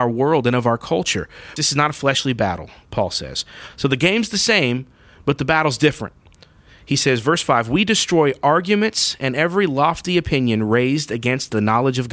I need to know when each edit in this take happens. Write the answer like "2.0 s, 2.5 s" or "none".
1.6 s, 3.7 s

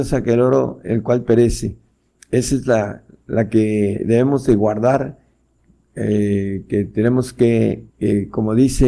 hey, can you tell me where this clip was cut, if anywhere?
7.9 s

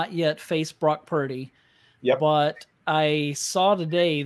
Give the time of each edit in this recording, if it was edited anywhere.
none

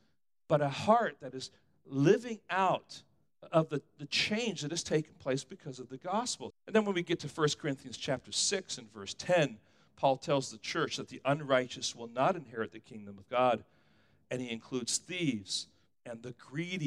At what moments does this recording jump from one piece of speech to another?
6.5 s

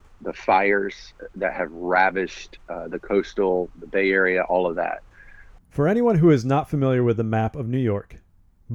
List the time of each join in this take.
5.6 s

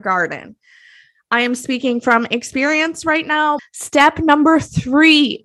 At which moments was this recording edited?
3.6 s

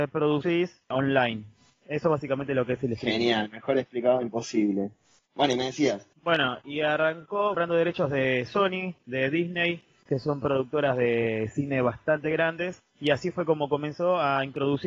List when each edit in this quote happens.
6.1 s, 10.0 s

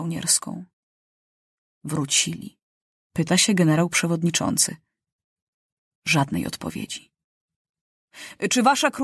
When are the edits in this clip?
3.1 s

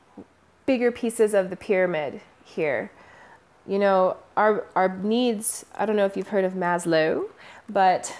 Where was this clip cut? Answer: none

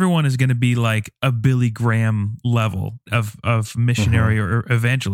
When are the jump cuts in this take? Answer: 3.1 s

